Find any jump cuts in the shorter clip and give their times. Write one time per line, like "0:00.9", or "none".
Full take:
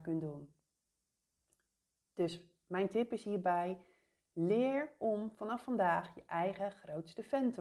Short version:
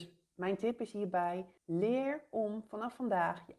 0:01.6